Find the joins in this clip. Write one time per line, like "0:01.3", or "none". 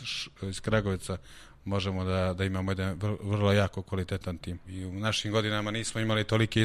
0:04.6

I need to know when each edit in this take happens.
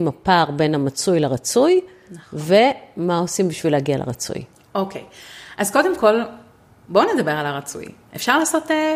none

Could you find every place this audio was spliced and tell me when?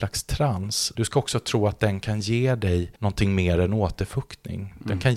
0:00.9
0:03.0

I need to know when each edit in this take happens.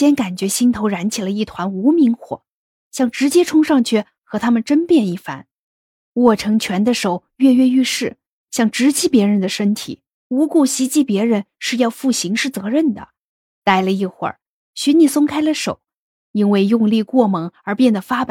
0:10.1
0:13.5

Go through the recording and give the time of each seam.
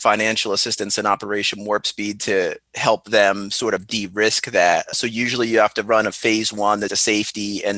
0:04.9
0:06.9

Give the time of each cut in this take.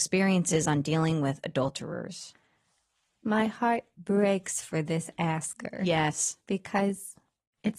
none

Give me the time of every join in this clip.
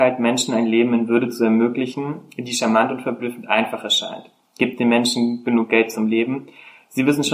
none

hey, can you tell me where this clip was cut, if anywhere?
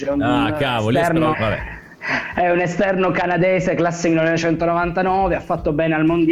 0:01.3

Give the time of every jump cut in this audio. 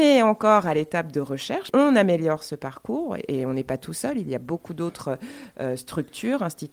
0:01.7

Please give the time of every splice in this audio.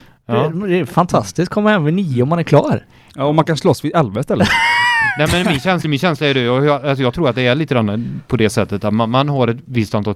none

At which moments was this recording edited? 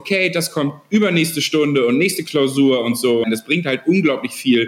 0:03.2

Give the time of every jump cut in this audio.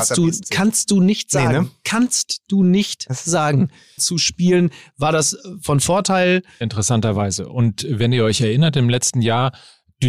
0:04.0
0:06.6

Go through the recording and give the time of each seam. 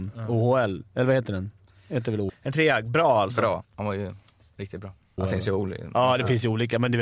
0:02.3
0:03.6
0:05.2

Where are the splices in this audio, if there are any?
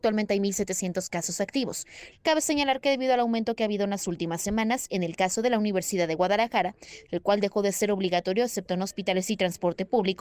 0:02.1
0:07.0

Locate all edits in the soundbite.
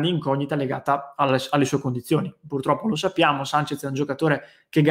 none

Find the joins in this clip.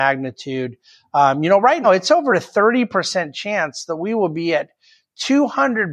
0:01.8

